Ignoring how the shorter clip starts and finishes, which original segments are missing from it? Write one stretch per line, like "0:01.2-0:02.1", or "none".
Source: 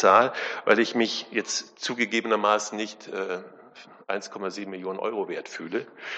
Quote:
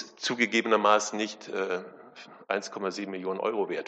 none